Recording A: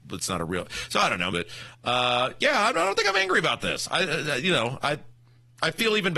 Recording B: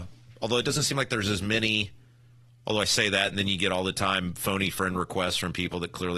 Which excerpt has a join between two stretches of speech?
A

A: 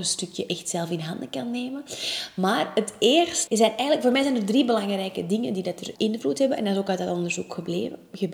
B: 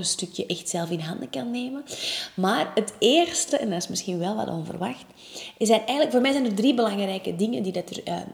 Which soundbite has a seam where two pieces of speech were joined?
A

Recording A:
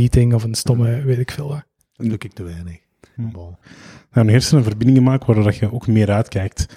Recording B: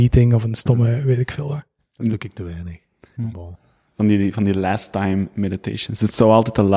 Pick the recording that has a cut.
A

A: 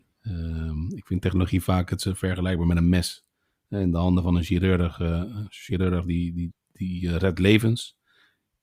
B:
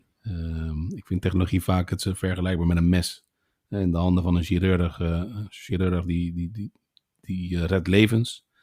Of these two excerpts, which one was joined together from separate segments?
A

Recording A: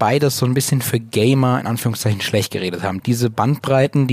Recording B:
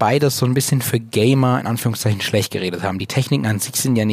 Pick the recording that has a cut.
A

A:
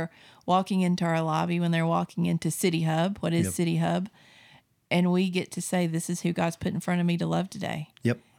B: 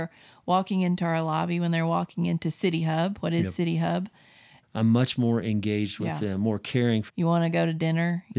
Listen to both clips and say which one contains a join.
B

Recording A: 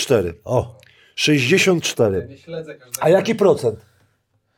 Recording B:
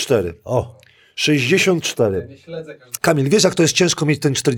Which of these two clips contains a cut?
B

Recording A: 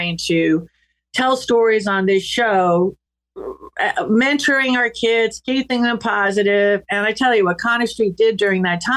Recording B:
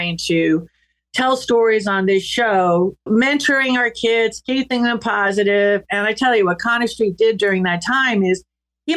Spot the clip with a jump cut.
B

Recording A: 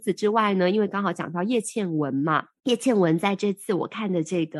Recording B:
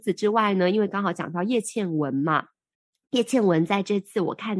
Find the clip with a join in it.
A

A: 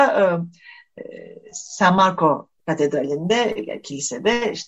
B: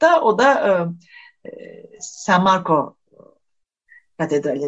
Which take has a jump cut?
A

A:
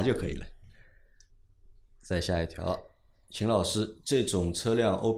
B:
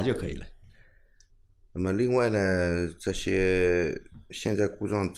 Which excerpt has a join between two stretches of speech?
B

